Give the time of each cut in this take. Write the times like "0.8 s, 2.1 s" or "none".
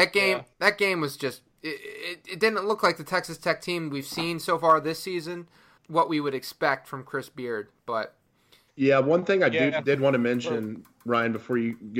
5.8 s

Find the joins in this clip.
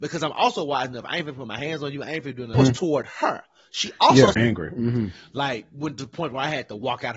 2.5 s, 4.3 s

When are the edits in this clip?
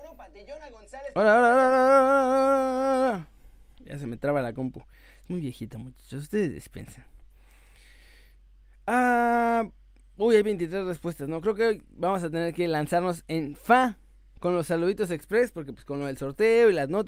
none

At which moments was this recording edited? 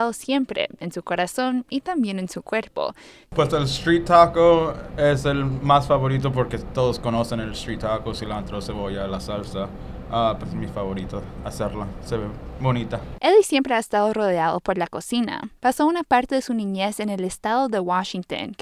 3.2 s, 10.4 s

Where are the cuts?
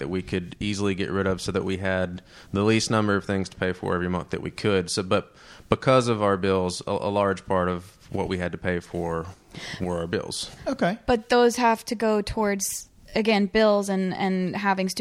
10.6 s

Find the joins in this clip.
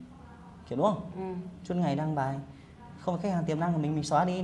none

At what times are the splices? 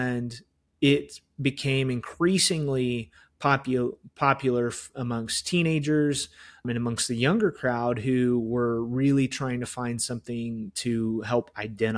6.6 s

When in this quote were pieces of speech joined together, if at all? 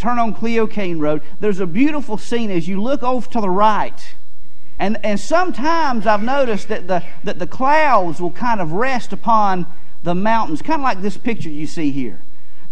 4.8 s

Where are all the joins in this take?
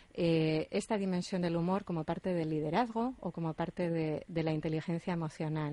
none

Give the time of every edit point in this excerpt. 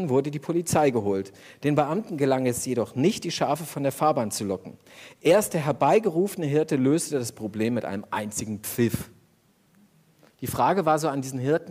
10.3 s

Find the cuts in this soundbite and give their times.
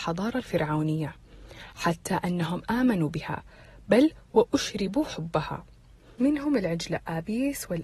none

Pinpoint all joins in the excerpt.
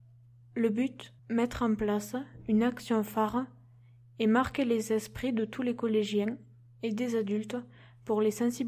1.2 s

